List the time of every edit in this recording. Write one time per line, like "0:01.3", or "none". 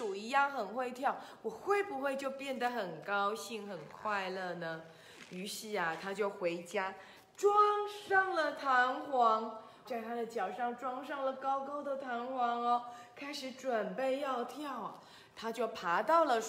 0:09.9

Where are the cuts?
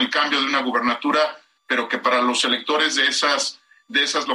0:01.6

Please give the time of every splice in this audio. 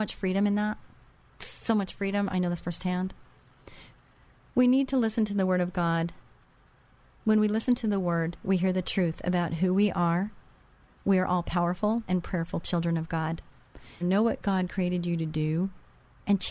0:12.1
0:14.0

